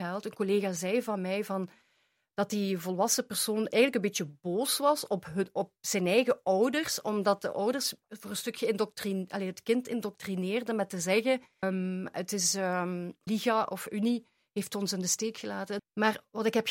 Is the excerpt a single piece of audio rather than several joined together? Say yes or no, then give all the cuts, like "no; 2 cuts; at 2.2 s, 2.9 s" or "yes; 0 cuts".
no; 3 cuts; at 11.6 s, 13.3 s, 15.8 s